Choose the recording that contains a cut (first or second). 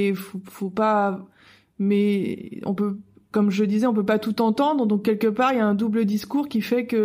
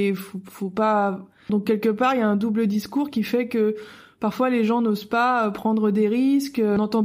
second